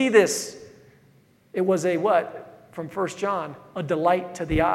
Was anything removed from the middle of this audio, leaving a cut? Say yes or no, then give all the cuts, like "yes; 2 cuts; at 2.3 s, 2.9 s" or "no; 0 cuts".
no; 0 cuts